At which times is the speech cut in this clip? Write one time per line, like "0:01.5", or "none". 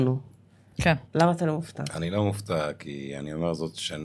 0:01.1